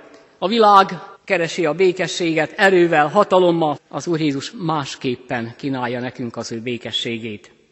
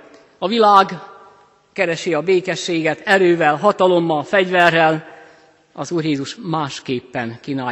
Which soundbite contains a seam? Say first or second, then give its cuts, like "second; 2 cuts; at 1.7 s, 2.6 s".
first; 2 cuts; at 1.1 s, 3.8 s